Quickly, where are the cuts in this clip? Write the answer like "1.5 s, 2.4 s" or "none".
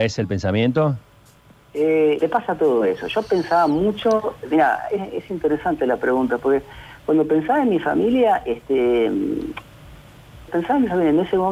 2.2 s, 10.5 s